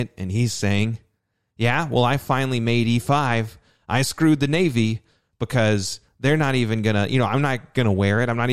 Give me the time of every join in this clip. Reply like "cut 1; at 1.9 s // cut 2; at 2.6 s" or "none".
none